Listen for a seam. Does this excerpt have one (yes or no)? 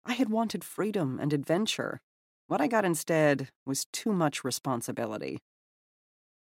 no